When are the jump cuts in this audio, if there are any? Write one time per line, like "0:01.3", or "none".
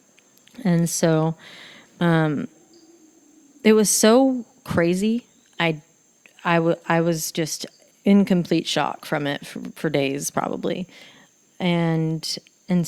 none